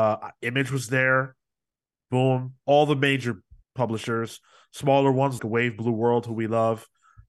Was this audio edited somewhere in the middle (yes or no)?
yes